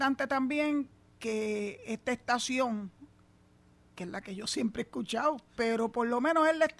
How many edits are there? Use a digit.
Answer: 1